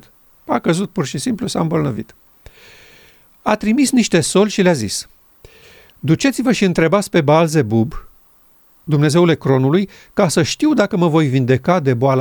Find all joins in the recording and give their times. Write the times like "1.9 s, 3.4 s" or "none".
none